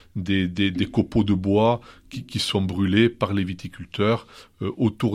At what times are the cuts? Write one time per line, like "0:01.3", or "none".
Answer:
none